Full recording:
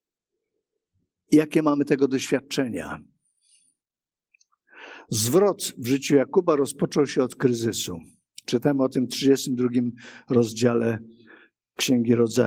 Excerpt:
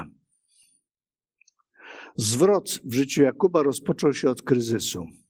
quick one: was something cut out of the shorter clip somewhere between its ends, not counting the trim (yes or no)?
no